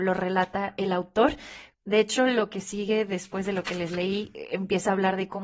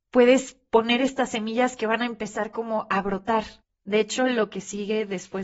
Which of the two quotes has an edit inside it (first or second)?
first